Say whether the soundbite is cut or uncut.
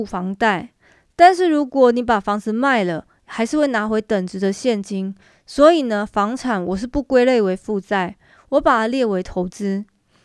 uncut